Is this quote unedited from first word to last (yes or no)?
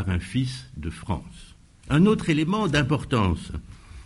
no